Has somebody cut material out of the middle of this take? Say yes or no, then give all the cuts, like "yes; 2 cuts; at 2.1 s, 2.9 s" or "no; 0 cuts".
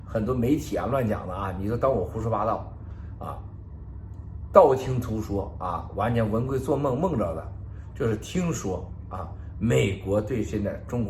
no; 0 cuts